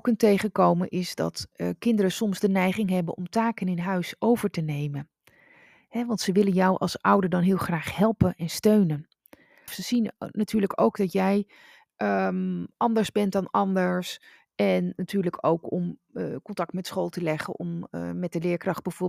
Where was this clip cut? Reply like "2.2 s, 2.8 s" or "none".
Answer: 9.7 s, 14.5 s